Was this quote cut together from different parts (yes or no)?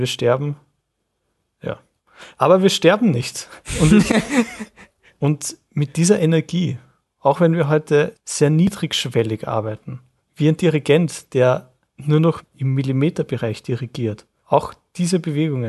no